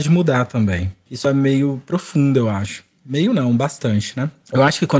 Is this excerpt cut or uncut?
cut